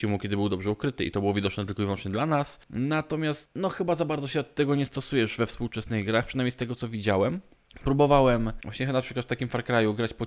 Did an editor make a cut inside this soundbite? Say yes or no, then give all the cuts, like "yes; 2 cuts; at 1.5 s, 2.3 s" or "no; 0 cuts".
no; 0 cuts